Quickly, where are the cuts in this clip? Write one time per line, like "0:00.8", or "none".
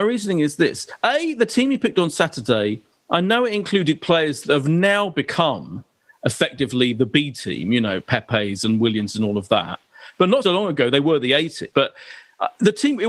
0:10.4
0:11.7